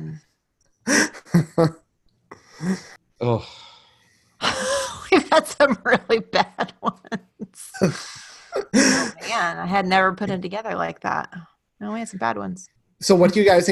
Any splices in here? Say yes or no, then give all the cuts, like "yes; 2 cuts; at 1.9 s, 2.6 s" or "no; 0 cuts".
yes; 1 cut; at 12.2 s